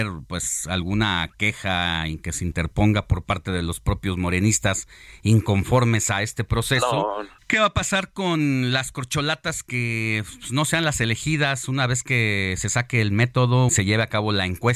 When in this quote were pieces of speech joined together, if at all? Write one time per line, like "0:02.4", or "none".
0:07.4
0:13.7